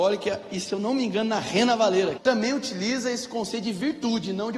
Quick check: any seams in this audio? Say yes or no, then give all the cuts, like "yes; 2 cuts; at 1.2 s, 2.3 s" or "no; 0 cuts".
yes; 1 cut; at 2.2 s